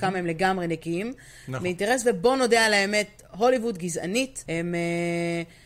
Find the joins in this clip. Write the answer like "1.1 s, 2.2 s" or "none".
4.5 s